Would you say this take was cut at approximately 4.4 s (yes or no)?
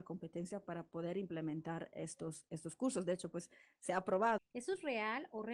yes